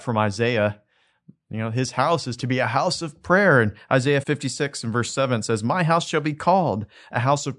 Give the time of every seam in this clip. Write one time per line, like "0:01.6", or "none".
0:04.2